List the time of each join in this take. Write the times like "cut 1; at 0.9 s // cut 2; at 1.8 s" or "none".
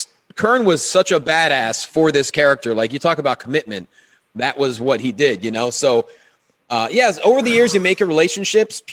none